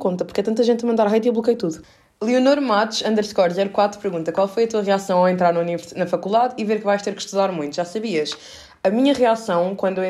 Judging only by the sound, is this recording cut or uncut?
uncut